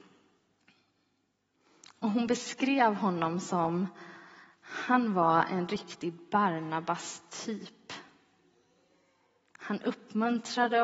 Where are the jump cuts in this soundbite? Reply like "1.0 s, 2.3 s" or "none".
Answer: none